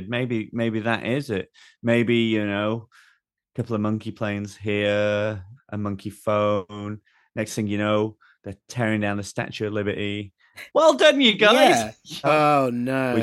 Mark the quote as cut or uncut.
cut